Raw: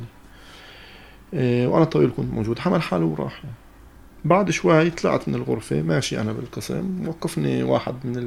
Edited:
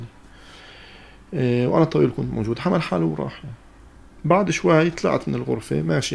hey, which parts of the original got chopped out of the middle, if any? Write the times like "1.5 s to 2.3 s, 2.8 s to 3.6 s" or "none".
none